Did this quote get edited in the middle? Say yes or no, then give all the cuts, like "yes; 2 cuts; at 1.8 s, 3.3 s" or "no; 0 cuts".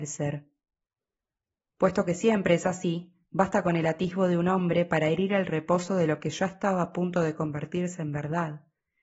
no; 0 cuts